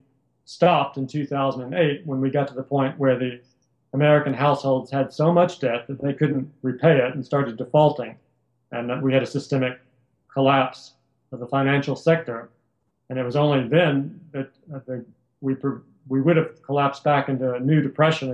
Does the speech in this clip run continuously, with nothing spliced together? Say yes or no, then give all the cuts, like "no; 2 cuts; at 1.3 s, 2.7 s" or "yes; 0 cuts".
yes; 0 cuts